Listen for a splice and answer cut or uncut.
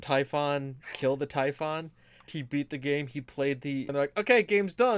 cut